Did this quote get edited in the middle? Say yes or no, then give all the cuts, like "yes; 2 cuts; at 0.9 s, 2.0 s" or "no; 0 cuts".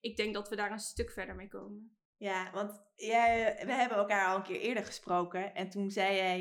yes; 1 cut; at 3.7 s